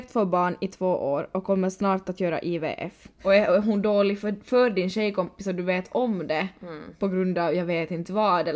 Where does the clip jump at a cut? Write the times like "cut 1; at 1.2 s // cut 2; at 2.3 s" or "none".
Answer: cut 1; at 3.2 s

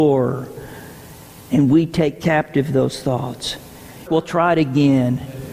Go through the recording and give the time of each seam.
cut 1; at 4.1 s

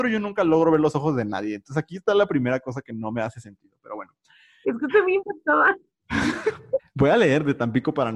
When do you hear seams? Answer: cut 1; at 4.6 s // cut 2; at 6.8 s

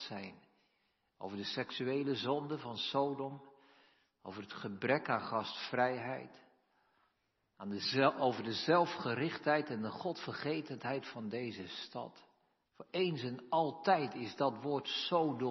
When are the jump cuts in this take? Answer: cut 1; at 12.6 s

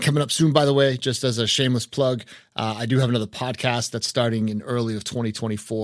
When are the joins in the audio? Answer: none

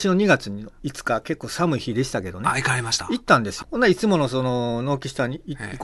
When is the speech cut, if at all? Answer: cut 1; at 3.6 s

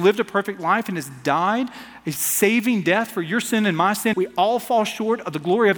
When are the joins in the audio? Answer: cut 1; at 4.1 s

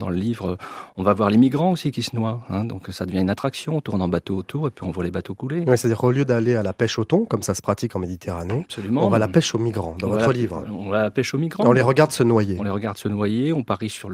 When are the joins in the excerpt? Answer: none

